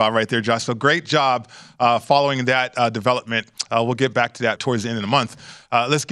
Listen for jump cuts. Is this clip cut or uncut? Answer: cut